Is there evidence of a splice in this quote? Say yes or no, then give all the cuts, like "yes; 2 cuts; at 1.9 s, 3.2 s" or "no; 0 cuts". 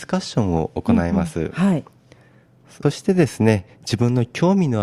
yes; 1 cut; at 2.8 s